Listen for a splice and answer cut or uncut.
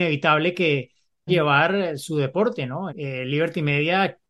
cut